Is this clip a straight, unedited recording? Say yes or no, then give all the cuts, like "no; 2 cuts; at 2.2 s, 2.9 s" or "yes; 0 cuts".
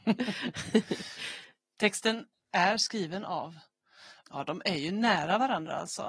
no; 1 cut; at 4.2 s